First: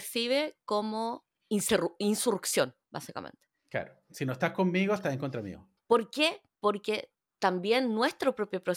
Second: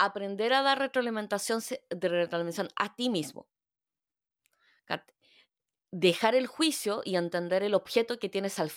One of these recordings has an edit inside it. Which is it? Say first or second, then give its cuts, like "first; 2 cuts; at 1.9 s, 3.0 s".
first; 1 cut; at 5.8 s